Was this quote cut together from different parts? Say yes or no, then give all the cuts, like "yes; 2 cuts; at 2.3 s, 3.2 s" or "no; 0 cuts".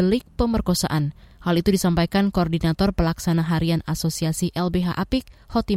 no; 0 cuts